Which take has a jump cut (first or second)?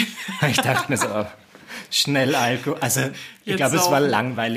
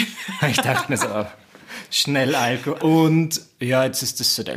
second